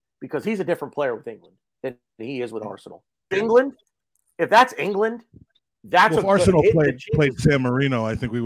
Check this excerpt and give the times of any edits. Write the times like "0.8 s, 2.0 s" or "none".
3.3 s